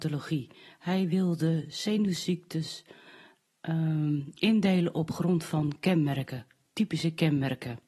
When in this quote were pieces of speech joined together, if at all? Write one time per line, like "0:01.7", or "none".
none